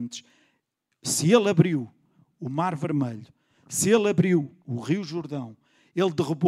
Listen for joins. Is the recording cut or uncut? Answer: uncut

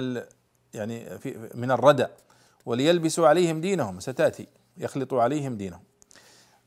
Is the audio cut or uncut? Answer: cut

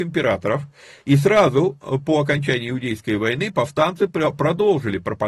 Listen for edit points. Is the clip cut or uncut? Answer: uncut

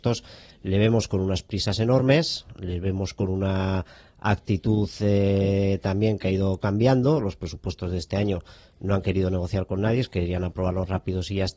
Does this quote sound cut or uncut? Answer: uncut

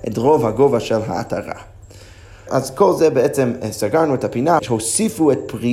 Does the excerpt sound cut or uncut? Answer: cut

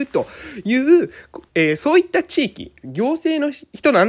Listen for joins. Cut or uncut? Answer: cut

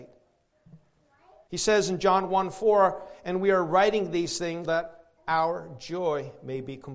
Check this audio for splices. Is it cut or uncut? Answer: cut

